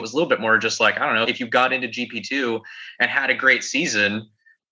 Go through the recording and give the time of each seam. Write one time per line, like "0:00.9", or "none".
0:01.2

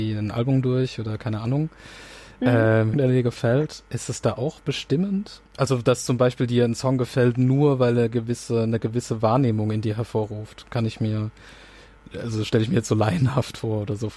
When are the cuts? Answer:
0:02.9
0:05.5

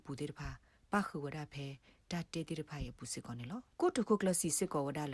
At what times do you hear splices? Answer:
0:03.7

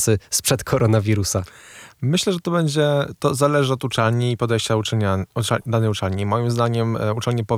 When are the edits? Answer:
none

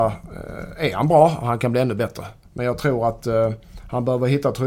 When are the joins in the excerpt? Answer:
none

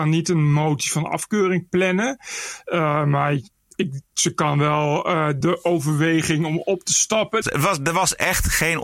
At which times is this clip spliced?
0:05.4
0:07.4

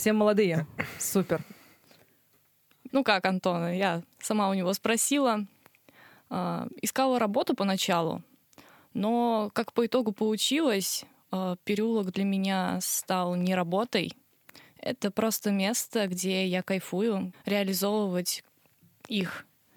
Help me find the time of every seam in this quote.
0:02.9
0:17.3

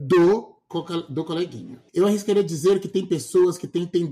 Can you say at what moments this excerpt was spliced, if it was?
0:01.9

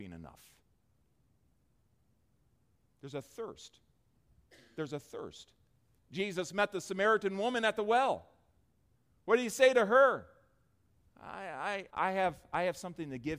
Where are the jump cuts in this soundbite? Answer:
0:06.0
0:11.9

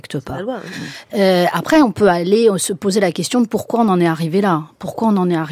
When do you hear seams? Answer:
0:01.1

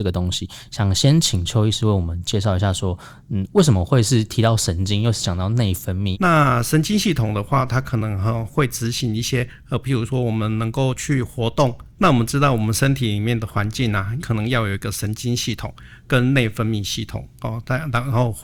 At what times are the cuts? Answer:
0:06.1
0:12.0
0:14.2

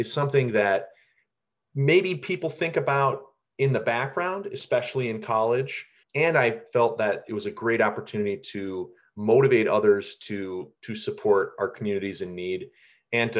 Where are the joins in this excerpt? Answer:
0:06.0
0:10.8

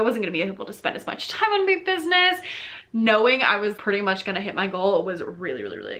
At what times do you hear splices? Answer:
0:03.8

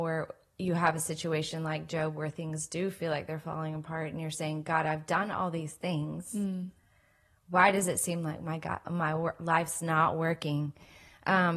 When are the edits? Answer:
none

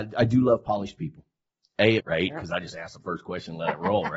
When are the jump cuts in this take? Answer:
0:02.0

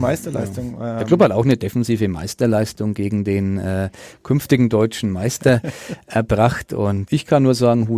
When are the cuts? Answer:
0:07.1

